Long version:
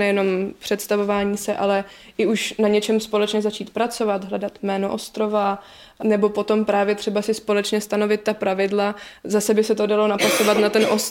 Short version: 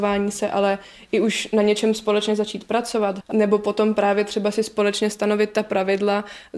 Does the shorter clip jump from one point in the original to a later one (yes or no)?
yes